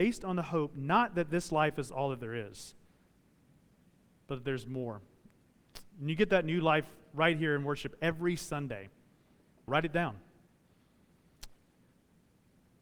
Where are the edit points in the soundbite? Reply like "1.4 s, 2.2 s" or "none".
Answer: 9.7 s, 11.8 s